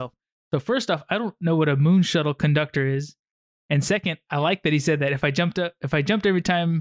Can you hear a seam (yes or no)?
no